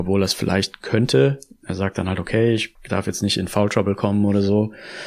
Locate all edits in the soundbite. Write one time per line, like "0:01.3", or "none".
none